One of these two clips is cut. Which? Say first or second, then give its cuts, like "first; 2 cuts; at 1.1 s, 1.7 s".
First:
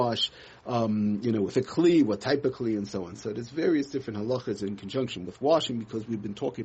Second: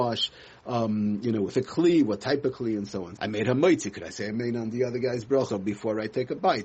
second; 2 cuts; at 3.2 s, 5.5 s